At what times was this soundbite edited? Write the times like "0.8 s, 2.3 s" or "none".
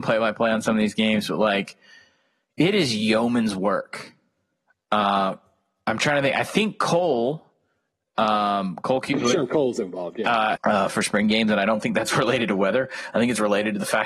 10.6 s

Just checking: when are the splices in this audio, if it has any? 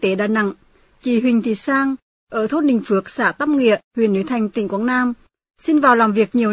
none

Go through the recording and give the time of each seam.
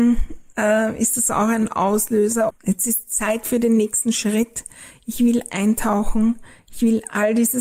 2.5 s

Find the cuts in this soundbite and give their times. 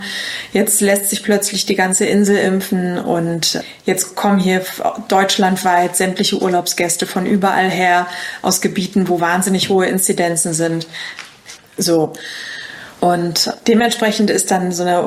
11.6 s, 13.0 s

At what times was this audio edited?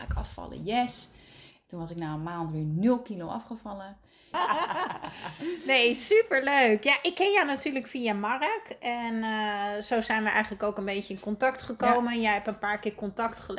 4.3 s

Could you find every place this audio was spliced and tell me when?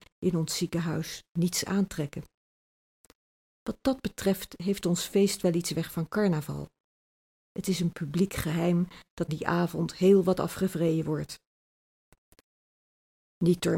9.3 s

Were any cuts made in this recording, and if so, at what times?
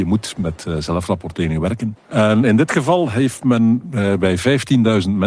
2.0 s

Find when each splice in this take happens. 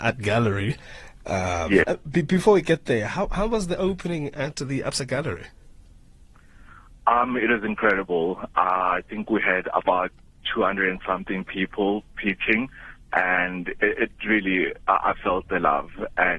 1.8 s

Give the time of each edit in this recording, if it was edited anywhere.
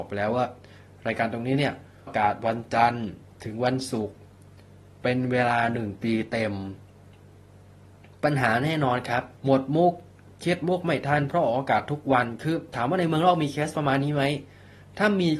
2.1 s, 9.4 s

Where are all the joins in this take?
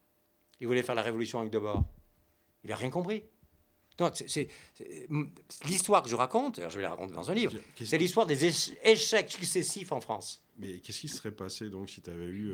none

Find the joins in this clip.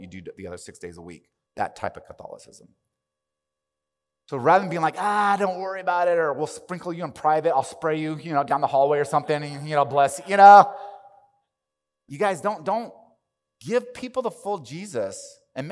1.5 s

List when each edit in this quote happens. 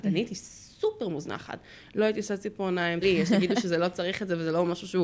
3.0 s

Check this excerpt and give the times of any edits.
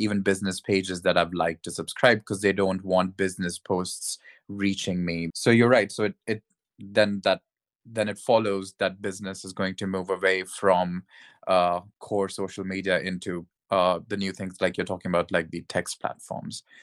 5.3 s

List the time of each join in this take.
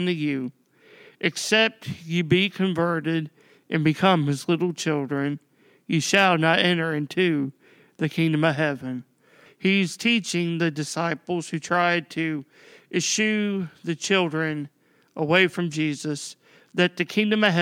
9.5 s

